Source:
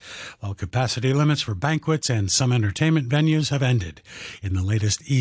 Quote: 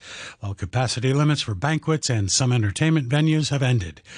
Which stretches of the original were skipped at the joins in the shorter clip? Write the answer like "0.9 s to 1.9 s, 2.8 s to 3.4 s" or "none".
none